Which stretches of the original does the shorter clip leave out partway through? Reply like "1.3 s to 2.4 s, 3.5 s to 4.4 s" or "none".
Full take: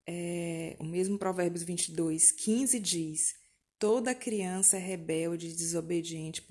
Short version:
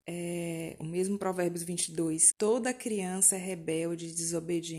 2.3 s to 3.7 s